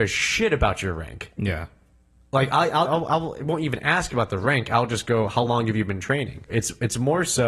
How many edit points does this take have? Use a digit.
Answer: 2